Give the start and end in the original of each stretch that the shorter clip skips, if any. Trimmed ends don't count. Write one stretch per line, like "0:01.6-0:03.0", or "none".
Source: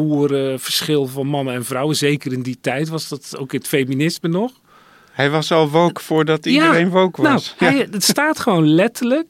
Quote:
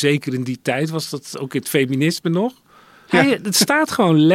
0:05.1-0:07.6